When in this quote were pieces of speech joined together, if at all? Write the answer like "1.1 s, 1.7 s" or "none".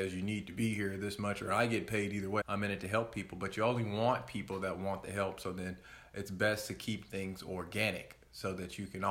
2.4 s